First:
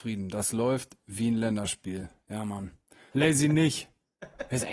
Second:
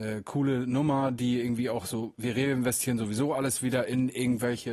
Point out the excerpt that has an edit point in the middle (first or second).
first